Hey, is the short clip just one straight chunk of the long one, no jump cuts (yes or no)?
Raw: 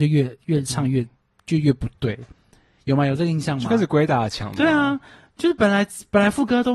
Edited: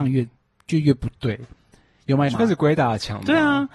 no